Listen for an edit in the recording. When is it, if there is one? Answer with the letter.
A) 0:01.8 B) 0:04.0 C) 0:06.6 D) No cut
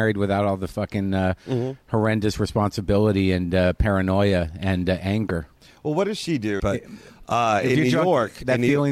C